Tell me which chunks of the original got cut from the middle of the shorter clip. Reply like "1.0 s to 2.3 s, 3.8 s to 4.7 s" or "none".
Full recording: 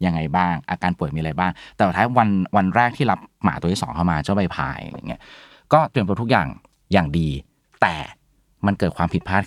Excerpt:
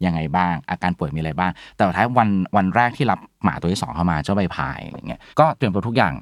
5.3 s to 5.6 s